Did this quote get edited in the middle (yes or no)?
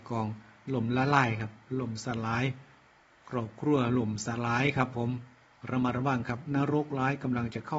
no